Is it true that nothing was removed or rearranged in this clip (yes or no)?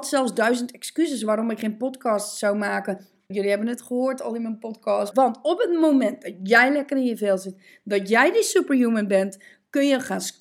no